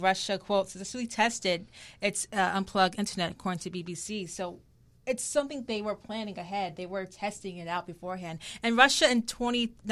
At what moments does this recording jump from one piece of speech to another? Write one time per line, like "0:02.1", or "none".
none